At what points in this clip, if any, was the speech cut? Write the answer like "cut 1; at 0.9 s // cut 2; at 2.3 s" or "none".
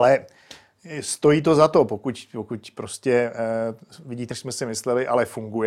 cut 1; at 4.3 s